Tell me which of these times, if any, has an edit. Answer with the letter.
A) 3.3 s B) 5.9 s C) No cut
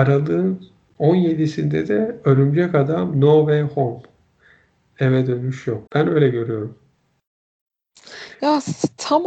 B